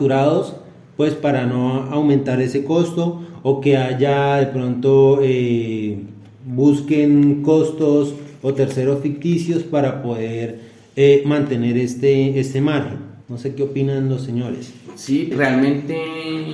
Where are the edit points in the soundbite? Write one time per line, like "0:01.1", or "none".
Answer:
0:13.2
0:15.3